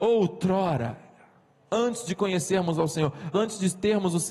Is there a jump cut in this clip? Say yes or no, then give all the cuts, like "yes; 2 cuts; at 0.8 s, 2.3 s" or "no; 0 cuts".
yes; 1 cut; at 3.3 s